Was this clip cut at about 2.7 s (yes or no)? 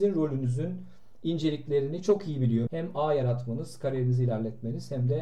yes